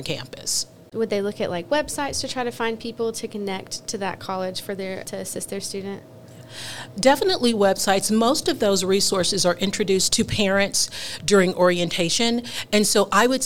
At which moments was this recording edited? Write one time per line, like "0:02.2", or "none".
0:00.9